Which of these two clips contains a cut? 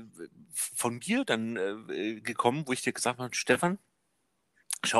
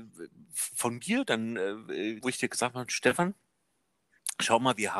second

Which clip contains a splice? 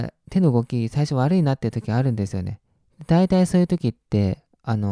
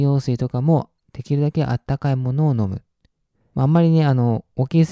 second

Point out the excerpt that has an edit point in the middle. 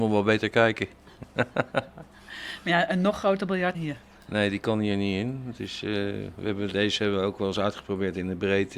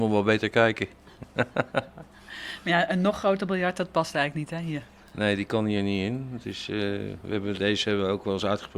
first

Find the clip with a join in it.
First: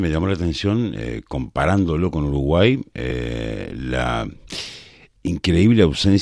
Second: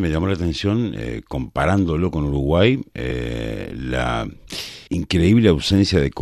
second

